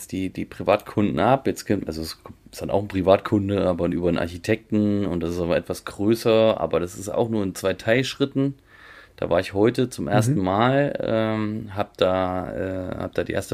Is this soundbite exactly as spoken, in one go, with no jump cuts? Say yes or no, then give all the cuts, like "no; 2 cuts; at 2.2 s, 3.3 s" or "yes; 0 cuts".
yes; 0 cuts